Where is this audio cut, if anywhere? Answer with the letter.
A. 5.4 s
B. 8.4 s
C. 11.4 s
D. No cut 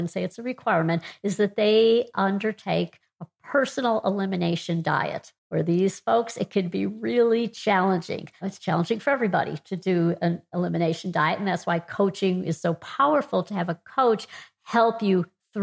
A